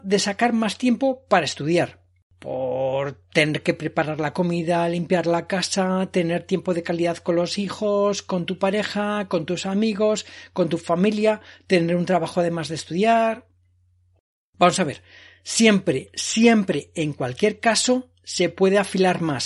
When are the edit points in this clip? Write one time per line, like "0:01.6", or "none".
none